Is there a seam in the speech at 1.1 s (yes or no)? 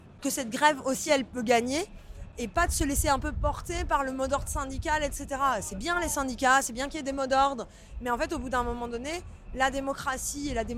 no